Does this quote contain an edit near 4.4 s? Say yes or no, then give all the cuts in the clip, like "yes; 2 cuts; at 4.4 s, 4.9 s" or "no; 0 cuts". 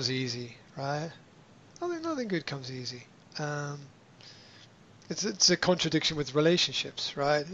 no; 0 cuts